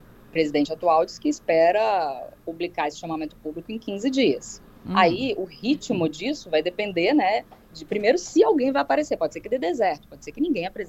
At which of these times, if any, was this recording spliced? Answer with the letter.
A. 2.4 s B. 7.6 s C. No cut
A